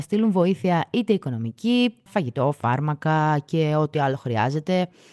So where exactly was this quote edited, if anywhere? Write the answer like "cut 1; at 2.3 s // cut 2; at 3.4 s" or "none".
cut 1; at 2.1 s